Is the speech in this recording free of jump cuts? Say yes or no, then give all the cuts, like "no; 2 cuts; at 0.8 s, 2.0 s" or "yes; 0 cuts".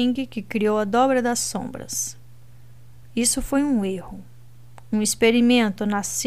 yes; 0 cuts